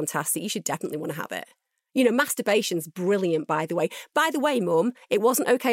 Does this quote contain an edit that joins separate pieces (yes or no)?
no